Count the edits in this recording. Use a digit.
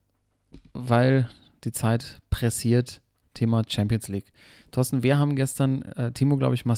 0